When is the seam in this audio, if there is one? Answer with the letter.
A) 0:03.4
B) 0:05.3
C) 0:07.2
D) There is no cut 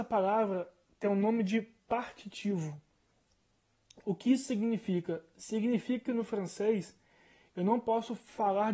D